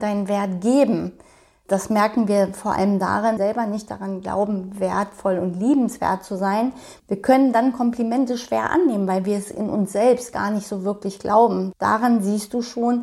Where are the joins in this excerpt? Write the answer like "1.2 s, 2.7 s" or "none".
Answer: 3.4 s